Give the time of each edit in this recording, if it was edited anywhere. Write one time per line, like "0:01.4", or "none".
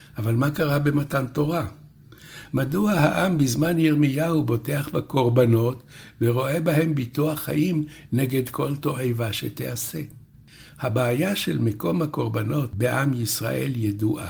0:02.5